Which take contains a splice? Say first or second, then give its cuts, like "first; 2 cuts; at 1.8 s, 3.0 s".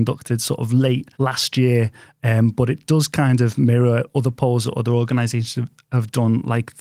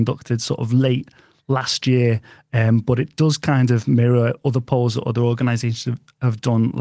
first; 1 cut; at 1.1 s